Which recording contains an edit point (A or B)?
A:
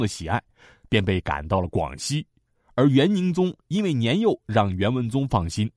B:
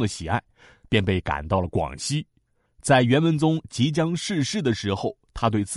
B